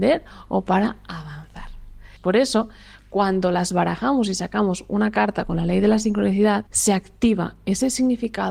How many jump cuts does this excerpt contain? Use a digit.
1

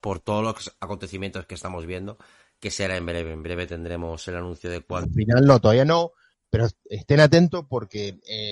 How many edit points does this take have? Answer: 1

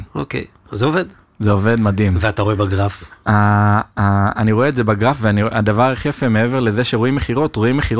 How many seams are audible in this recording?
0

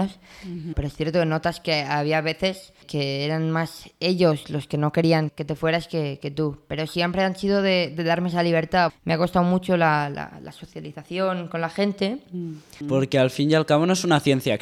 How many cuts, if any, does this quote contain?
3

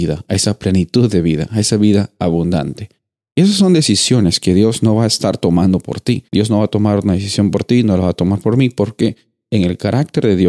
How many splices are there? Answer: 1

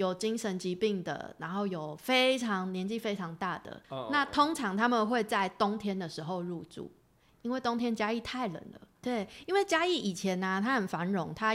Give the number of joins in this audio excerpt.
2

